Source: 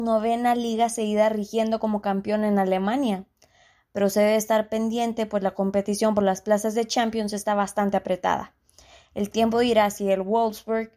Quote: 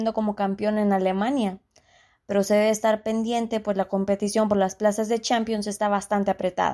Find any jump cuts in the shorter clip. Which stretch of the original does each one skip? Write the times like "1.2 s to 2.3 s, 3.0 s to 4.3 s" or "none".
none